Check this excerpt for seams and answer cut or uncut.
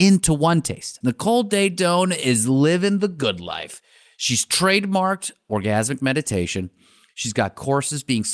cut